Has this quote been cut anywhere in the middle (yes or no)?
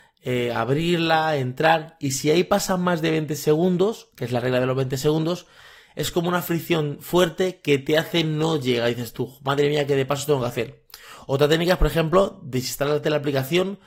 no